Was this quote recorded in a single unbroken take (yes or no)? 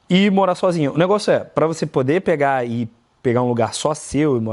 yes